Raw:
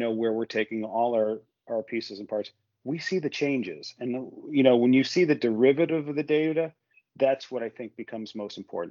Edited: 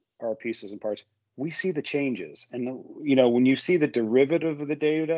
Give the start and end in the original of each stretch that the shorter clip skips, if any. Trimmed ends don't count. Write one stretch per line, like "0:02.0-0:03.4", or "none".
none